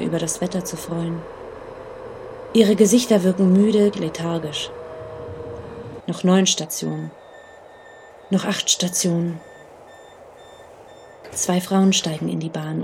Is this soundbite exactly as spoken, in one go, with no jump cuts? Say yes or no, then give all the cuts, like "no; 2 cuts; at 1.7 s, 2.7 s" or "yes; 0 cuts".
no; 2 cuts; at 3.9 s, 6.0 s